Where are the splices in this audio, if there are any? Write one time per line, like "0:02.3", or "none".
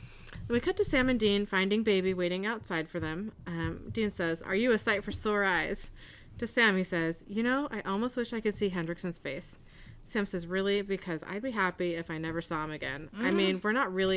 0:04.4